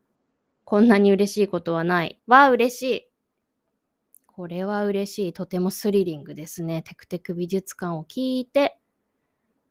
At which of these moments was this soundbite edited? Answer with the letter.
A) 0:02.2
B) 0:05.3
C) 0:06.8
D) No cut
A